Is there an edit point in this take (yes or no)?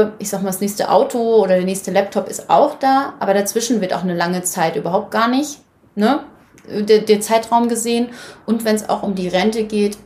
no